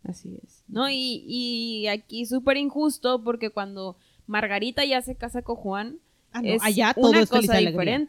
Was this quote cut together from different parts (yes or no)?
no